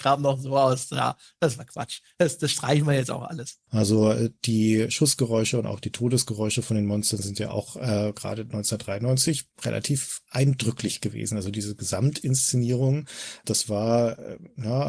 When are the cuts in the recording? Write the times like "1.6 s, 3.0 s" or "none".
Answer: 3.7 s, 13.4 s